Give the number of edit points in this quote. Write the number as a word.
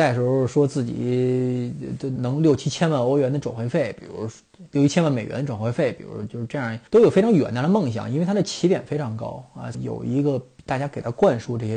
three